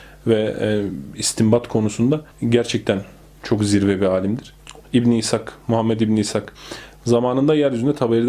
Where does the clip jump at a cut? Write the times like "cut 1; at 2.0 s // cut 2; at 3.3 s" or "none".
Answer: cut 1; at 2.3 s // cut 2; at 4.8 s